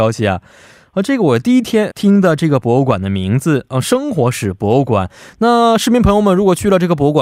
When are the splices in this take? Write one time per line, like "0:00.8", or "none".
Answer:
0:01.9